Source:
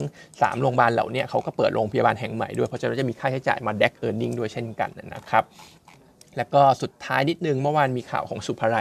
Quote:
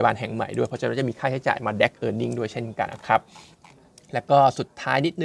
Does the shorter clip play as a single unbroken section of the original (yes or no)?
no